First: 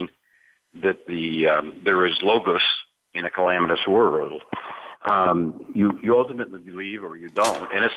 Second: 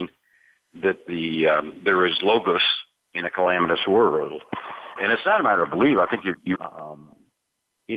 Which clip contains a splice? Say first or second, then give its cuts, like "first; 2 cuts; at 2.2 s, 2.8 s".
second; 2 cuts; at 5.0 s, 6.6 s